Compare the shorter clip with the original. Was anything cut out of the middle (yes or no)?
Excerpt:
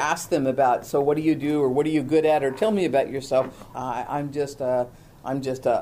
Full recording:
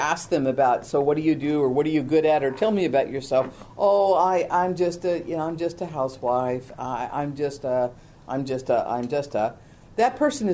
yes